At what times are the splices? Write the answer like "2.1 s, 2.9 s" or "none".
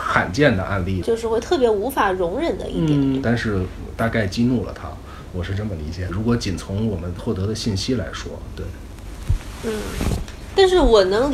1.0 s, 3.2 s, 6.1 s